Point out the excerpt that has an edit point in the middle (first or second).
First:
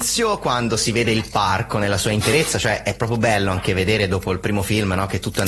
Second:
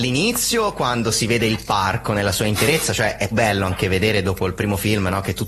second